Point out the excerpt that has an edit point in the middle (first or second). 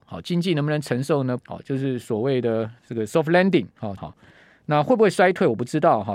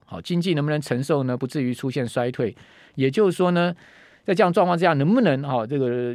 first